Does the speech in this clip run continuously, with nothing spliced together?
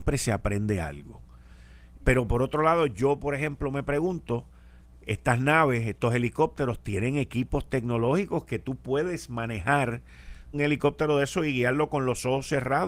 no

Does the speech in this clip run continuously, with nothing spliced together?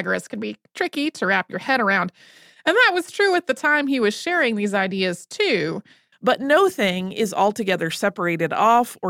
no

